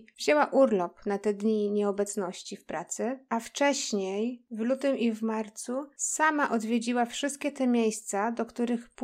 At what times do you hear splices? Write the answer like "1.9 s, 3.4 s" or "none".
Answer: none